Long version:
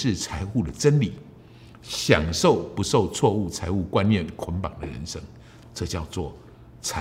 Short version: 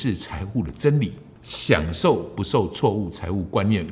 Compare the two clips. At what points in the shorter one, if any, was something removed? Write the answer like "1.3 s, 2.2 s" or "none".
1.4 s

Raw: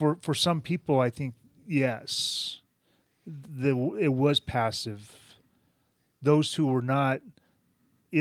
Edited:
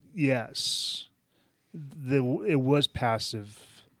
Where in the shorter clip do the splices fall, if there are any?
none

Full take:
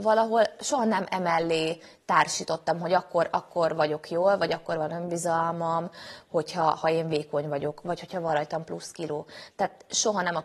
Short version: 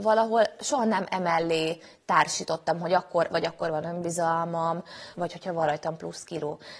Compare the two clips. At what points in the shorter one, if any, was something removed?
3.3 s, 5.1 s

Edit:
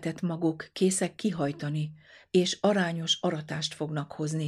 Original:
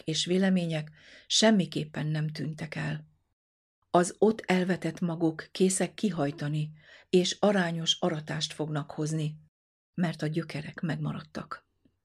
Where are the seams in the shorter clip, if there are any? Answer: none

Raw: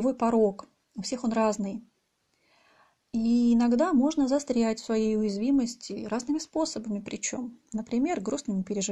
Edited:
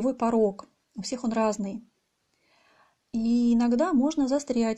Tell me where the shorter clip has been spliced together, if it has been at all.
none

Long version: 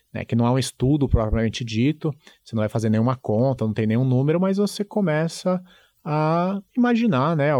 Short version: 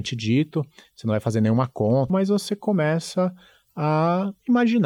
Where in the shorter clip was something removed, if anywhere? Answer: 2.1 s

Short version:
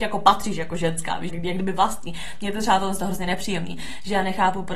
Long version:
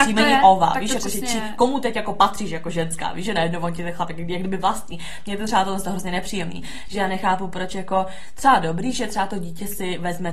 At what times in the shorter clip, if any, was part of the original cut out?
1.3 s

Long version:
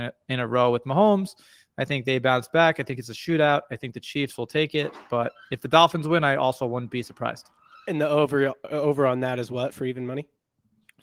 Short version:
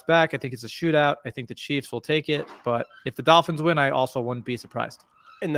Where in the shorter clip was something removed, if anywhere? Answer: none

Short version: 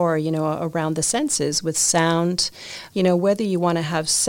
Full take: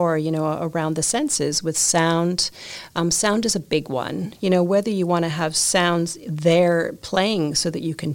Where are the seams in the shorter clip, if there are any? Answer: 2.9 s

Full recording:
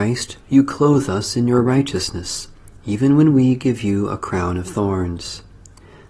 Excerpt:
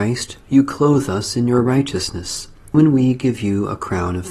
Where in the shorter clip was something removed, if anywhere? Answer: 2.7 s

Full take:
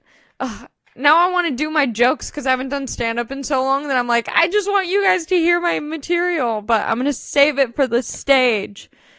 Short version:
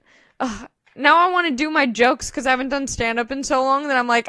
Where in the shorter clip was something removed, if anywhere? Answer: none

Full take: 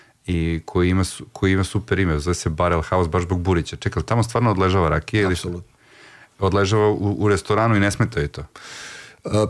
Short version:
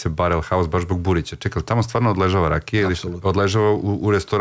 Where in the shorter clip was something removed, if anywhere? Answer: 3.2 s

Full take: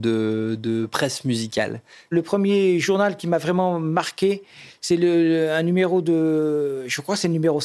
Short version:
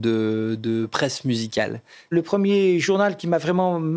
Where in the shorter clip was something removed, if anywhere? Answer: none

